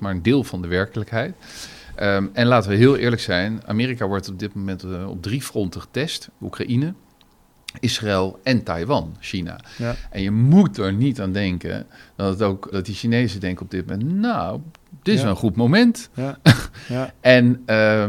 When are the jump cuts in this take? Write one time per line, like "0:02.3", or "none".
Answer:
0:12.7